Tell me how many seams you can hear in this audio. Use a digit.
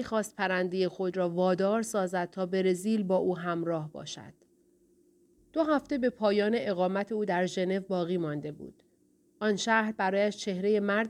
1